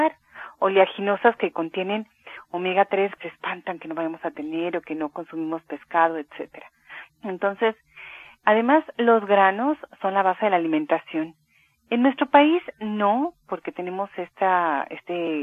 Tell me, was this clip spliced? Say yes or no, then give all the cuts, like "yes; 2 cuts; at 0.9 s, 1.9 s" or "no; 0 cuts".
yes; 2 cuts; at 3.2 s, 7.1 s